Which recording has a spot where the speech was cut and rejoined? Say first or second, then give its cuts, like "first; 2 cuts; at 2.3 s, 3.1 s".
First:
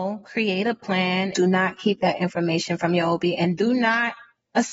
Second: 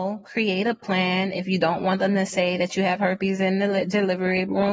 first; 1 cut; at 1.3 s